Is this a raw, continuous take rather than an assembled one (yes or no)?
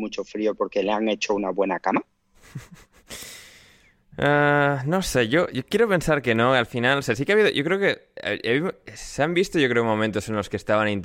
yes